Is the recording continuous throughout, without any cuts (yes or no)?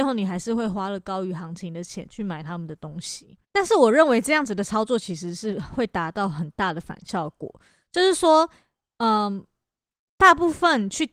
no